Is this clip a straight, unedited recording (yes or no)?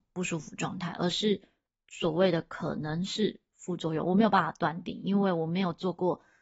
yes